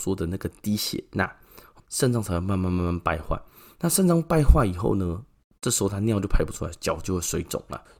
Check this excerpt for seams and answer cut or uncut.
cut